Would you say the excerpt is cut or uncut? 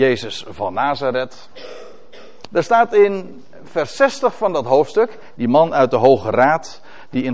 cut